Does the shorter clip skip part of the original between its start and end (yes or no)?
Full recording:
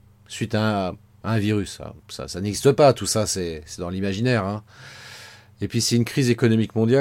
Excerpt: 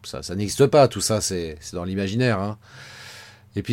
no